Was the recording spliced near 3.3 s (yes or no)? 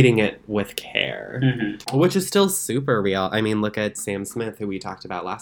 no